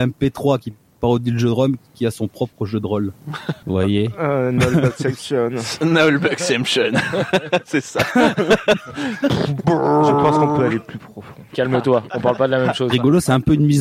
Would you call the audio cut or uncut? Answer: cut